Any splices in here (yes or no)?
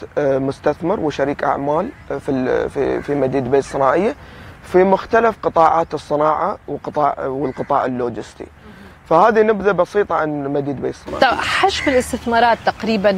no